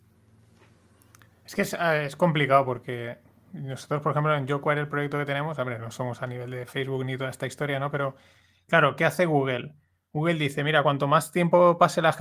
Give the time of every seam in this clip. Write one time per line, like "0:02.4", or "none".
none